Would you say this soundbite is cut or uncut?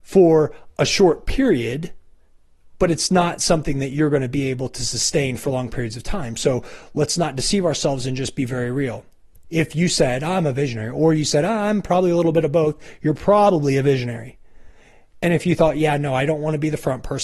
uncut